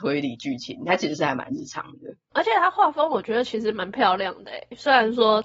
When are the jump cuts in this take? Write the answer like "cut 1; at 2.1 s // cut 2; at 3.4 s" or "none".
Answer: none